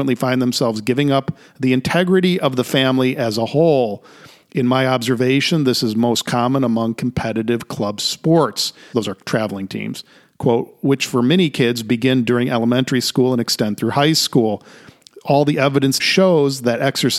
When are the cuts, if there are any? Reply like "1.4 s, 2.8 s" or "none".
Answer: 8.9 s, 16.0 s